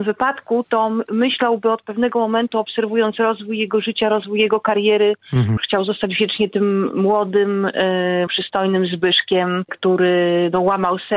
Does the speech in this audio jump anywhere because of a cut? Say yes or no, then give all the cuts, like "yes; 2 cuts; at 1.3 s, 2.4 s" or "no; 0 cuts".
yes; 2 cuts; at 5.6 s, 8.3 s